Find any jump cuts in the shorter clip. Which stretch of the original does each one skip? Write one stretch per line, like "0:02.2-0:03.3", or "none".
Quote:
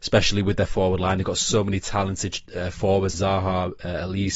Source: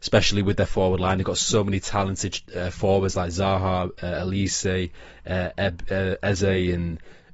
0:03.1-0:03.3